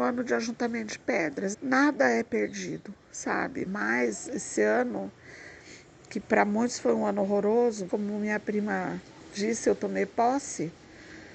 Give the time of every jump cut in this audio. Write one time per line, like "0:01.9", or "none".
0:01.5
0:03.7
0:07.9